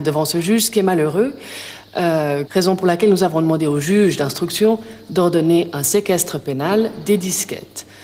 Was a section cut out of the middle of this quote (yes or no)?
yes